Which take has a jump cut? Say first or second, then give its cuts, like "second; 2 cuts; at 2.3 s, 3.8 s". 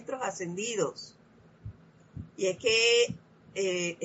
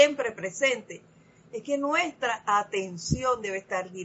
first; 1 cut; at 2.3 s